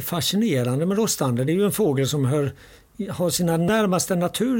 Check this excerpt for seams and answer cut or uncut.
uncut